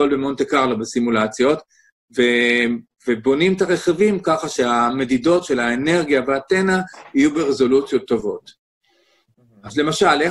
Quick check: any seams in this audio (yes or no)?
no